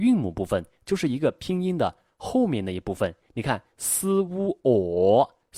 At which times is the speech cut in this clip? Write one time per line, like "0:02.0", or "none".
none